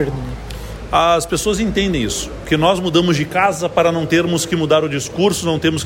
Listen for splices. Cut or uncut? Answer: uncut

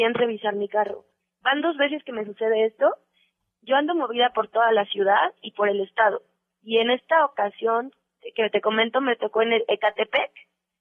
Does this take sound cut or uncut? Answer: uncut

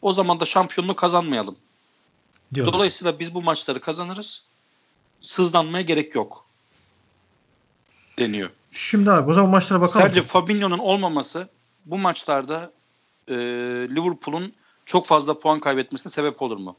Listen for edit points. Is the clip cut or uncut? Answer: uncut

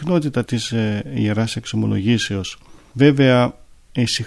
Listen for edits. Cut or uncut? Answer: uncut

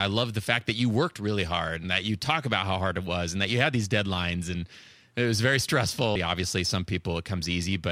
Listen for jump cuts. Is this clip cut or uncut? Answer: cut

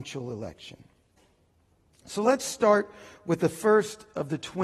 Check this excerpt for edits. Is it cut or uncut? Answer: uncut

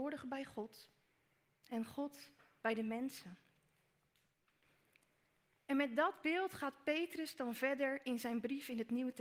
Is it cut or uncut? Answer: uncut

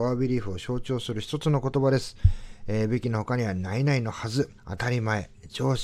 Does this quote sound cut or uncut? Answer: cut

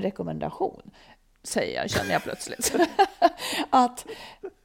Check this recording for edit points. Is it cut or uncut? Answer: uncut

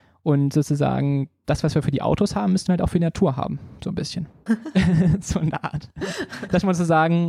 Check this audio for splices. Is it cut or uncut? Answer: cut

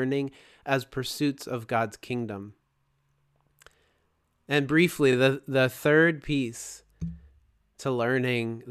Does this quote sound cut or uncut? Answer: uncut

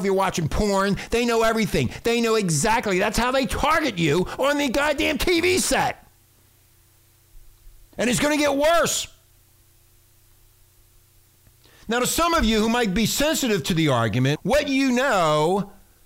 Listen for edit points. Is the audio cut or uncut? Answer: cut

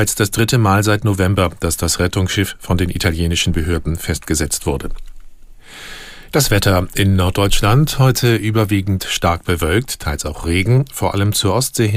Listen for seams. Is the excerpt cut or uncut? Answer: cut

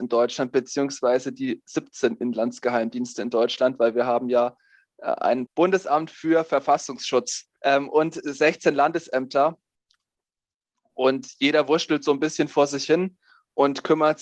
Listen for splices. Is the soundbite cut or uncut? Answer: uncut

